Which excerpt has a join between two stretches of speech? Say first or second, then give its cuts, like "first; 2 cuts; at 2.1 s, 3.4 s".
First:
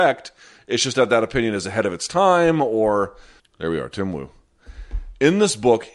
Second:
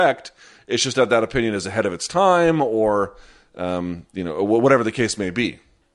first; 1 cut; at 3.4 s